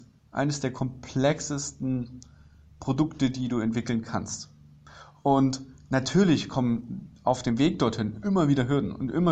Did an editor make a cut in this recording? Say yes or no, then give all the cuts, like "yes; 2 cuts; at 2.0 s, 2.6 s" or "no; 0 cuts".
no; 0 cuts